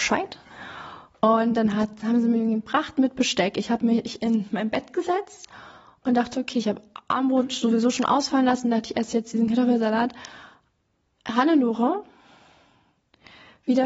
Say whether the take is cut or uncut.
uncut